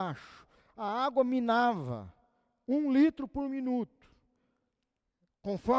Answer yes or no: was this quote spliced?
no